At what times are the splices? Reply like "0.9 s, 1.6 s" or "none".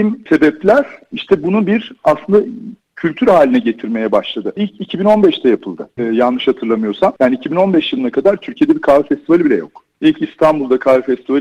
4.6 s